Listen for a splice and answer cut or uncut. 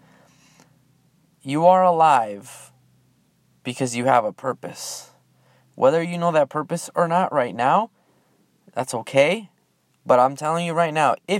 uncut